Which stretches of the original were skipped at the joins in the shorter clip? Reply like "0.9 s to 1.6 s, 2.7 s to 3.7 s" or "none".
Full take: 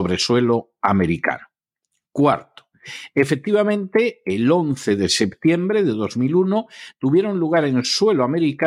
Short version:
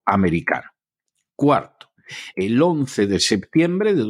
3.1 s to 4.2 s